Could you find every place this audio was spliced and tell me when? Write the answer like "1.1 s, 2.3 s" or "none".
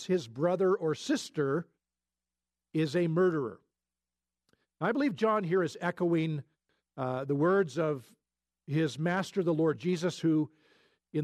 none